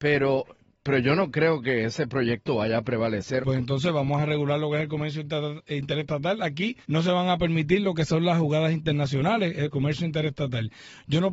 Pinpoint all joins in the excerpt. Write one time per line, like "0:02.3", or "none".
0:03.4
0:06.8
0:09.7